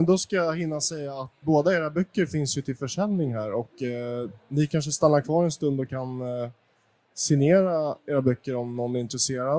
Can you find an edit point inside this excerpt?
yes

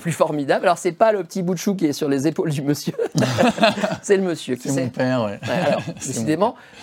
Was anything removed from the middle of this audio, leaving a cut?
no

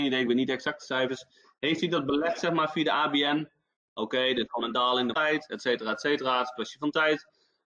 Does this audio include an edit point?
yes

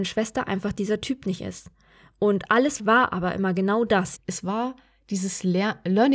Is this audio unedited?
no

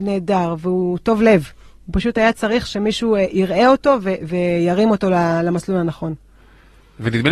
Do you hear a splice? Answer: no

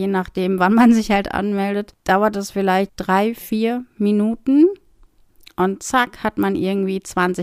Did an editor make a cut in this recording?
yes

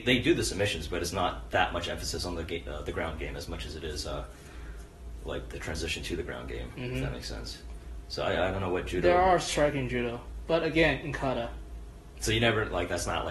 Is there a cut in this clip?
no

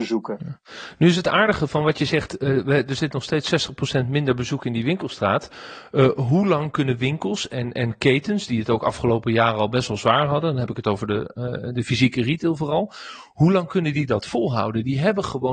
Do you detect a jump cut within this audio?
no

